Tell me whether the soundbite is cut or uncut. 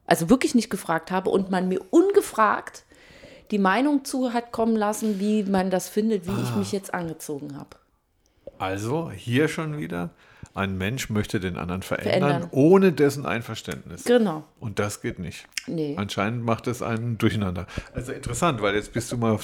uncut